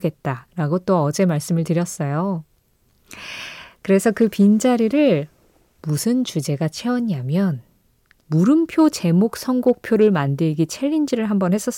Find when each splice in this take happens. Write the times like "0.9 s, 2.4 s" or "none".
8.2 s